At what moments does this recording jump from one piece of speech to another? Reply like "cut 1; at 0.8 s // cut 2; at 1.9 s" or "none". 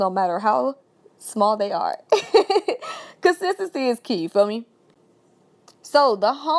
none